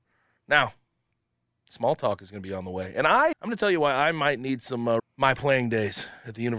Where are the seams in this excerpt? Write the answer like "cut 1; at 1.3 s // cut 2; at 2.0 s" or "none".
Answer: cut 1; at 3.3 s // cut 2; at 5.0 s